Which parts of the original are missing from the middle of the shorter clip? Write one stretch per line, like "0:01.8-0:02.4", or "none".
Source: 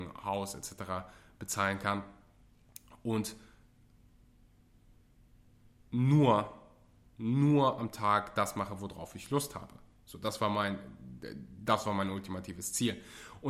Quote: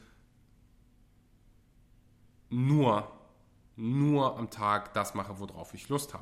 none